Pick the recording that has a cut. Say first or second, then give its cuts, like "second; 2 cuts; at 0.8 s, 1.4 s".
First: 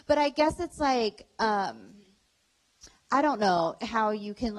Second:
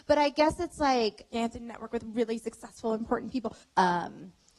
second; 2 cuts; at 1.3 s, 3.6 s